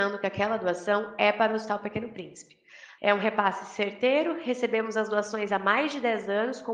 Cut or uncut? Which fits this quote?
cut